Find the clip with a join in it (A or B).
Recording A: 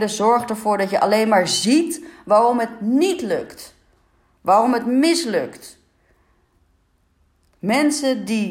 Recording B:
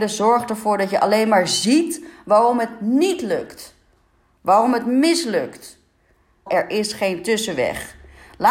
B